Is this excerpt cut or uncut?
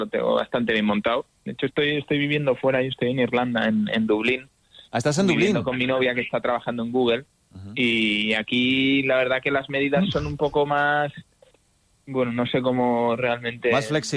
uncut